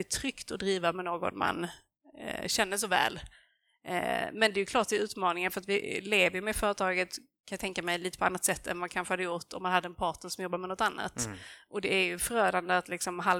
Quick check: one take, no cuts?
yes; 0 cuts

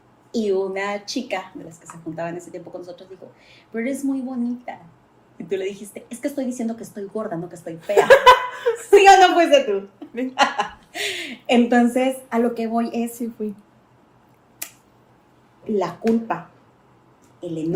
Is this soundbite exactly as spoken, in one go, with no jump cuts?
yes; 0 cuts

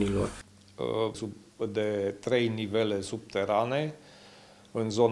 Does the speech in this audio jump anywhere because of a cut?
yes; 1 cut; at 1.1 s

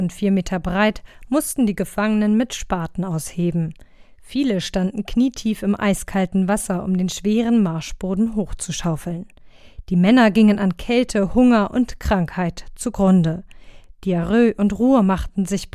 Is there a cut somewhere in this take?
no; 0 cuts

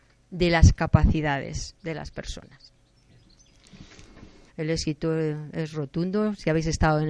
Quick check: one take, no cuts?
no; 1 cut; at 4.5 s

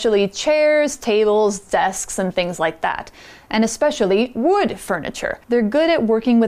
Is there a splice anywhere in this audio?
yes; 1 cut; at 5.4 s

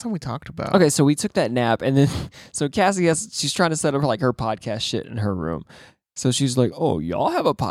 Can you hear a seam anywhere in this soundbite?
no; 0 cuts

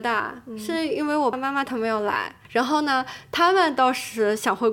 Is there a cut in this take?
yes; 1 cut; at 1.3 s

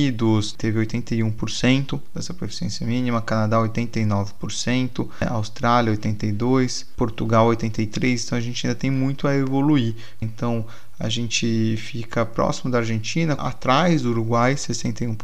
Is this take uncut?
no; 2 cuts; at 10.2 s, 13.4 s

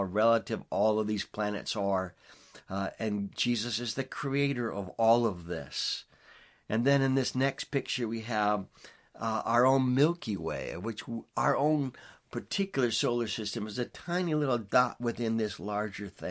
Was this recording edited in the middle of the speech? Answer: no; 0 cuts

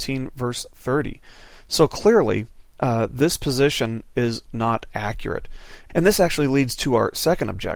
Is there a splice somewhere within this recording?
no; 0 cuts

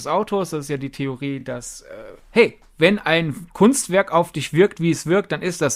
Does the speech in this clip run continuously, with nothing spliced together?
yes; 0 cuts

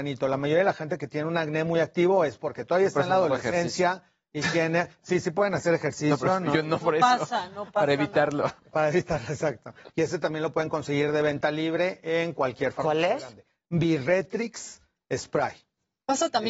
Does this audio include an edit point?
yes; 1 cut; at 9.9 s

